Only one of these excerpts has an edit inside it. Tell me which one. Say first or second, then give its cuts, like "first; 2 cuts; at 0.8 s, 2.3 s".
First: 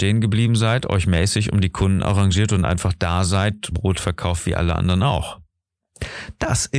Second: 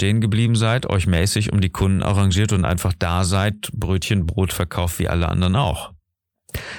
first; 1 cut; at 3.7 s